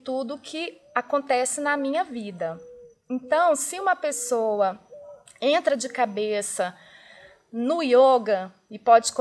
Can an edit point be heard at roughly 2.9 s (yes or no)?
no